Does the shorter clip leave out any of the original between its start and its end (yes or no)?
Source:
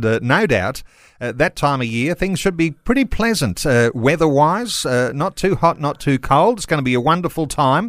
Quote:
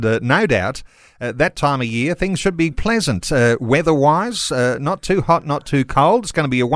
yes